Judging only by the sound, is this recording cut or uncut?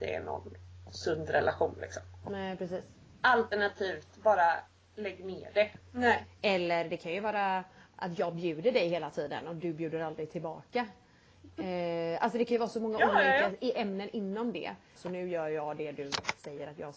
cut